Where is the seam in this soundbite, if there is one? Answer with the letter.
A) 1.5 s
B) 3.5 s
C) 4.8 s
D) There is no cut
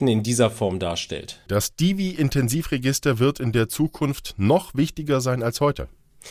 A